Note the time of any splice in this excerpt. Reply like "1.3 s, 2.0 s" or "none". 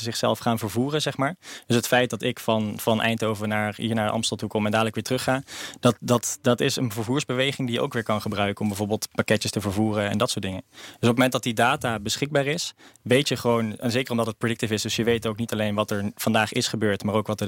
none